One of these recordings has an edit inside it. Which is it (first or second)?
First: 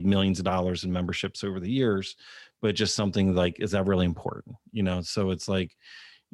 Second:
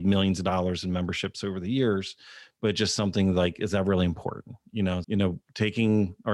second